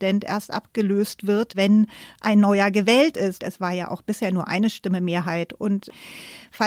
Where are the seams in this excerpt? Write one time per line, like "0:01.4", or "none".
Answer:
0:03.4